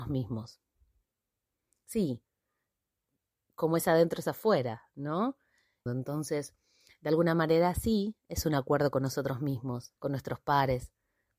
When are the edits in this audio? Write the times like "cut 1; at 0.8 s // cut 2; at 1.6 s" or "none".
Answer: cut 1; at 5.9 s // cut 2; at 10.0 s